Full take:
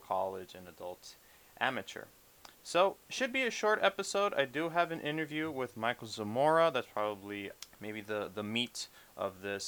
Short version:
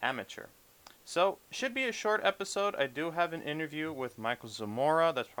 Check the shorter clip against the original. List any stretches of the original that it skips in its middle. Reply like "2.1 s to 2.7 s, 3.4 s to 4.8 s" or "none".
none